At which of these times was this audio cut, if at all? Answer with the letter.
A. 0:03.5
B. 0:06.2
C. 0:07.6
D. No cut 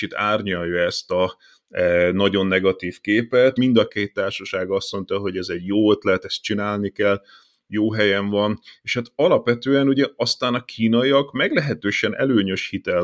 A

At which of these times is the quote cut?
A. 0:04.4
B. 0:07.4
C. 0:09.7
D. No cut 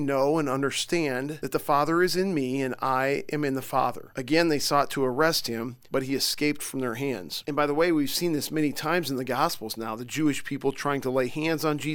D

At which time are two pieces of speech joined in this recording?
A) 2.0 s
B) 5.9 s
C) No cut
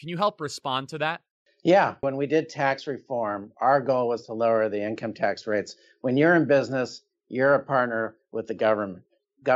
A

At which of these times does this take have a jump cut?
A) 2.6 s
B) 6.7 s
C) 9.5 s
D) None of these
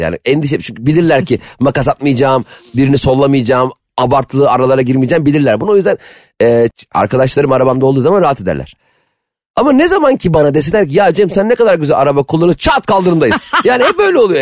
B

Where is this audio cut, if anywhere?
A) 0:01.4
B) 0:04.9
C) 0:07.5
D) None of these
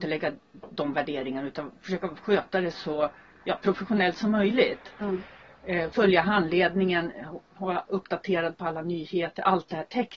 D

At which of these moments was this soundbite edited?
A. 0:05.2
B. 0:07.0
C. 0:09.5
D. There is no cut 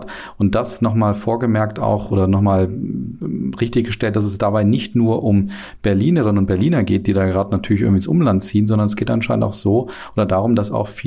D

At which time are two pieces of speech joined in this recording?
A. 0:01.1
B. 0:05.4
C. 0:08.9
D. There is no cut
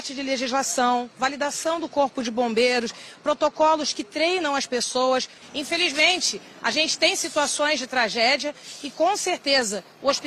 B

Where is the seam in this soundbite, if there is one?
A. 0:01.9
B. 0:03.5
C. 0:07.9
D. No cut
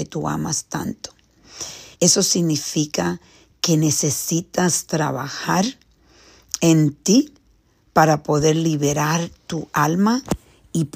A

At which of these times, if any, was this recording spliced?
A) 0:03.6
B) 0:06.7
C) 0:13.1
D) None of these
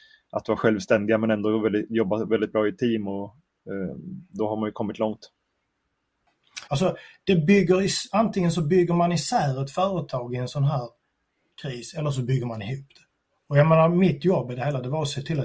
B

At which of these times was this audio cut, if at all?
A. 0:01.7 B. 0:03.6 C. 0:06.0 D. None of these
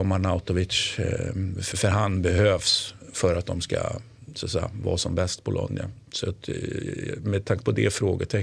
A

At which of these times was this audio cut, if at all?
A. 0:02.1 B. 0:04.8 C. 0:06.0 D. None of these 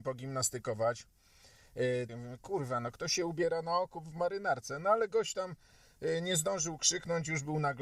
A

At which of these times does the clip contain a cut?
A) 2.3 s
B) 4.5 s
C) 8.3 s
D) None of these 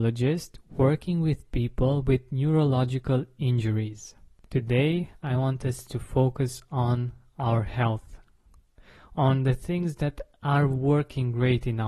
B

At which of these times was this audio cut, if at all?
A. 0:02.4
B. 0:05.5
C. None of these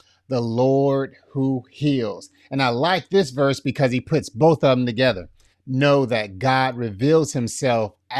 B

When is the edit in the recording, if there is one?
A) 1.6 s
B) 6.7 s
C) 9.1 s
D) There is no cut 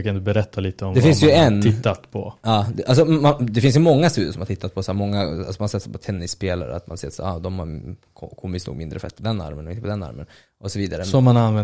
C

